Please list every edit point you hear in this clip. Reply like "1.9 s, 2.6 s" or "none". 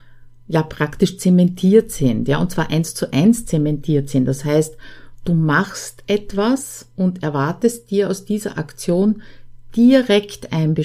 none